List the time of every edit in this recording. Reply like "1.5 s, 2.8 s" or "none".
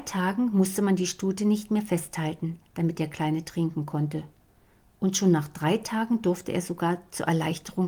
none

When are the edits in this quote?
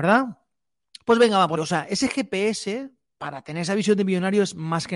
1.6 s

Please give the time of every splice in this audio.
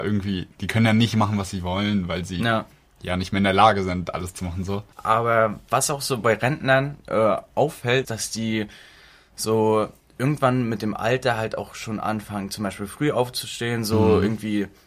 4.9 s, 8.0 s

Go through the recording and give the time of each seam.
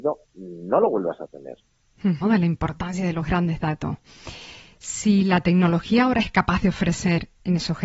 2.2 s

